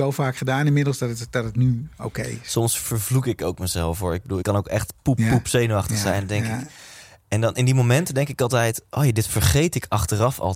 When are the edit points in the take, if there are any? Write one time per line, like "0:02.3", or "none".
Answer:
0:04.4